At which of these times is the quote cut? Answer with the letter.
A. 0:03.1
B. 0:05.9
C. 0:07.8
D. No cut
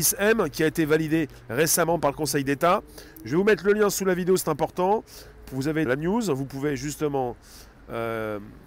B